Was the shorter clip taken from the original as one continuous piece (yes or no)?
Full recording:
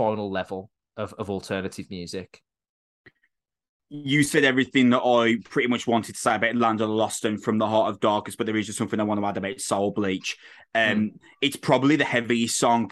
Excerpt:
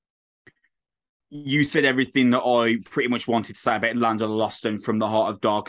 yes